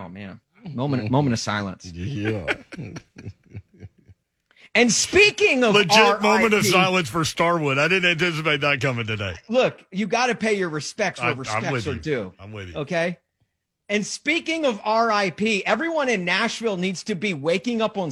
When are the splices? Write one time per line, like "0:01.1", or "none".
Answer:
none